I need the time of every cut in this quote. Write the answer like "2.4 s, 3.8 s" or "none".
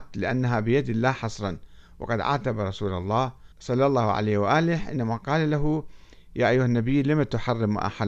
3.5 s